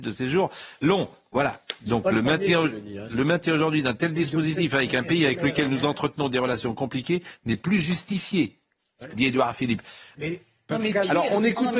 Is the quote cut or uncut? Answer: cut